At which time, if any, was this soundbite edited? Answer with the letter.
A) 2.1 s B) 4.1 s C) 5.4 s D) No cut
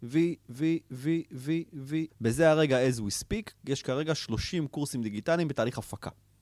A